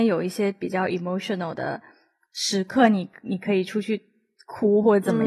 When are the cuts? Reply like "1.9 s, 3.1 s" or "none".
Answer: none